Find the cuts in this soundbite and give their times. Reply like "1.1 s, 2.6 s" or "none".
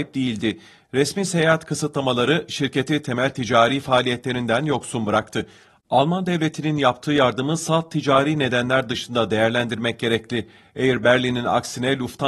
5.8 s